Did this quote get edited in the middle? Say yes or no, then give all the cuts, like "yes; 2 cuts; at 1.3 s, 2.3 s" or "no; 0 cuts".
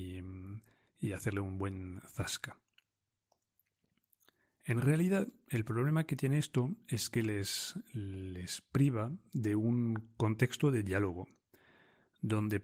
no; 0 cuts